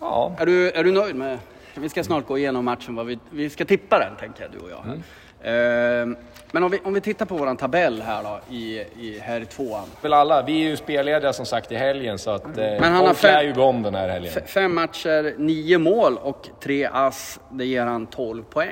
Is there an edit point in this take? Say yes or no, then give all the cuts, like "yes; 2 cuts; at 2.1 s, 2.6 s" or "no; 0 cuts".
yes; 2 cuts; at 1.7 s, 10.0 s